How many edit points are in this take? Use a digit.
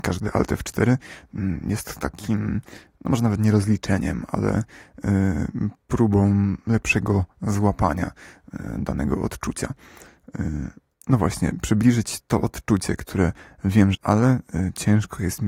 2